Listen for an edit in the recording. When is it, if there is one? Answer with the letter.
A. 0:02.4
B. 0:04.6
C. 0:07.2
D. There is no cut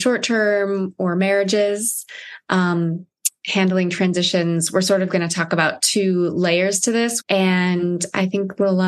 C